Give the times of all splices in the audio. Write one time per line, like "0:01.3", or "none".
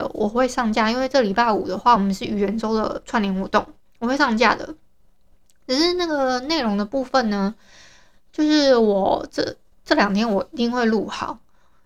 none